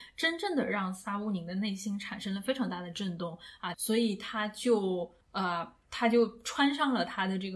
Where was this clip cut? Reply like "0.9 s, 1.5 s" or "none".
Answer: 3.7 s, 5.2 s